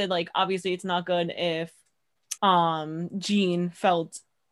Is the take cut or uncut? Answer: cut